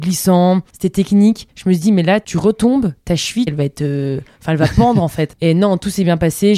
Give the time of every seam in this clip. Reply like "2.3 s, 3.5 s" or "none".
3.5 s

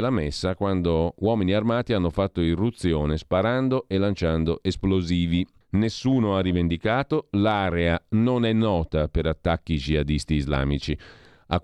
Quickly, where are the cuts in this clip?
5.6 s

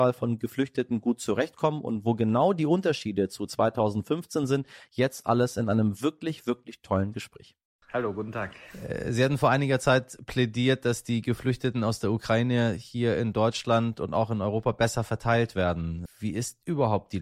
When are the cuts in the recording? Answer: 7.8 s, 16.1 s

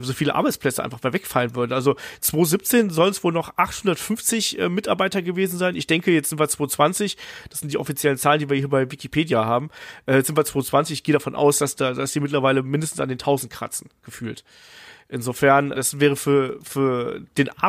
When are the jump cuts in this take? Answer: 15.7 s

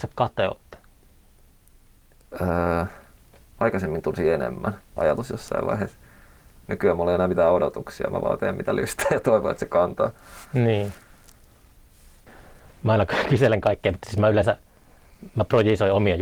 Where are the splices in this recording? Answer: 5.0 s

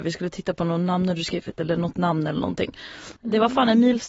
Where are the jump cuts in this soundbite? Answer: 3.2 s

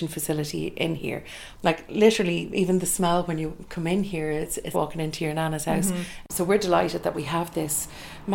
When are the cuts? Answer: 4.7 s

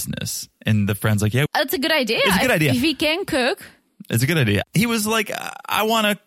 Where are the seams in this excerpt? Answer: 1.5 s, 4.6 s

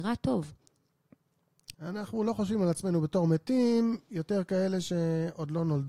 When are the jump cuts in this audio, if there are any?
1.7 s

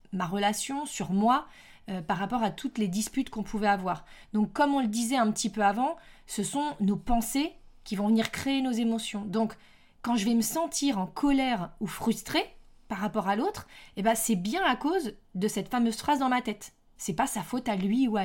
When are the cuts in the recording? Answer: none

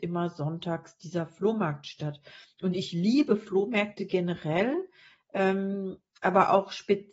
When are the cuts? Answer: none

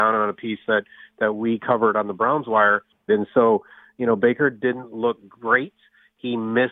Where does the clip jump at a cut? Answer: 3.1 s

